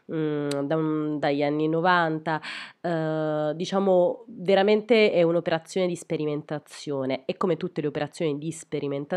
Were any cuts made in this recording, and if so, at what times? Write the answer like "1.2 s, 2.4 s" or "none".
1.2 s